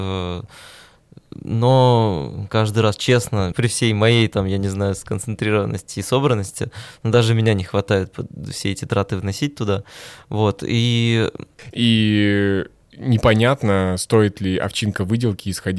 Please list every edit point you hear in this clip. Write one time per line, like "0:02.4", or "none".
0:03.5
0:11.7